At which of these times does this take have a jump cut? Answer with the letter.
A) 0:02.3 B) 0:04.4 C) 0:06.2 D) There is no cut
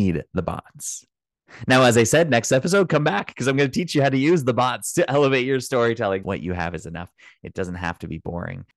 C